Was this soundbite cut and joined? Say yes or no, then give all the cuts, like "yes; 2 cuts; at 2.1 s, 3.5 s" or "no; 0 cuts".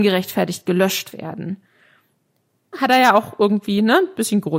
yes; 1 cut; at 2.7 s